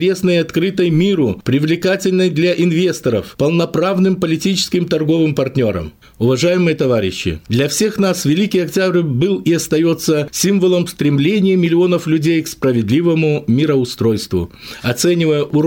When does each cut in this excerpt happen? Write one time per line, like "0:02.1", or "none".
0:06.0
0:07.4